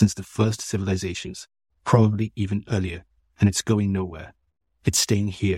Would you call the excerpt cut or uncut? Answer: uncut